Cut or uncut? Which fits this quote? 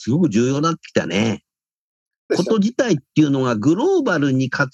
cut